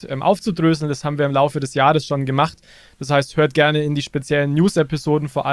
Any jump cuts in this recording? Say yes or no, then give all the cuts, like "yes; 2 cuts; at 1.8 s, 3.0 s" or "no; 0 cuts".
no; 0 cuts